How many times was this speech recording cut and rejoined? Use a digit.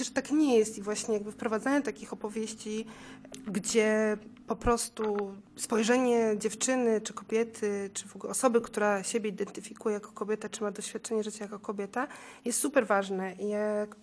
0